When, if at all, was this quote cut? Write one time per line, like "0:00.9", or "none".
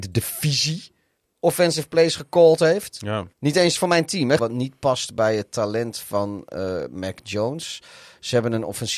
0:03.3
0:04.4